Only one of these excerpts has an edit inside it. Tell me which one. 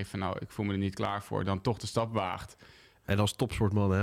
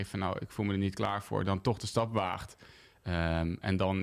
first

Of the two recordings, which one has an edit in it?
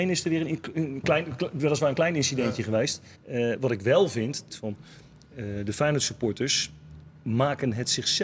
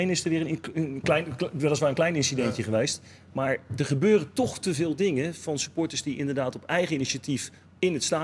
first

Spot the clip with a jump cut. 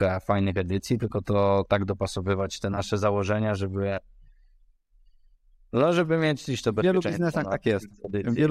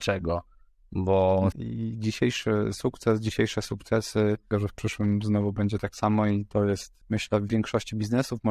second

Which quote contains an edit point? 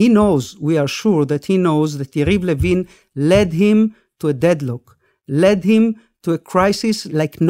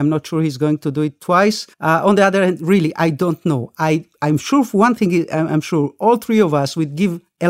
second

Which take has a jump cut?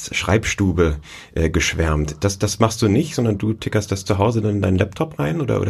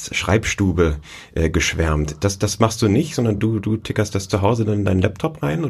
first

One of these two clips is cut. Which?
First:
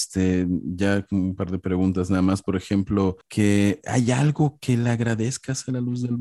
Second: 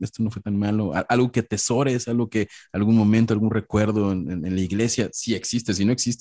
first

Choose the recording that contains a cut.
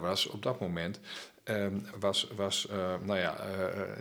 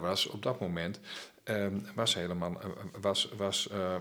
first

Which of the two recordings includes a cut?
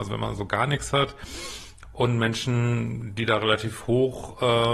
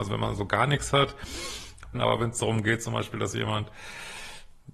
second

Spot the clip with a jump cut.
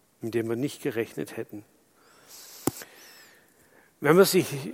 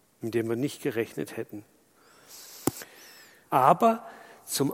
second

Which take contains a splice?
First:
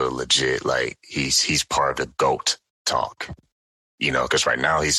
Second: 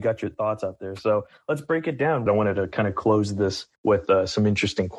second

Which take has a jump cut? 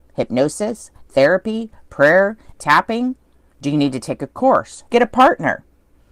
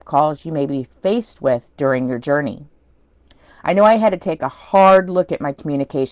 first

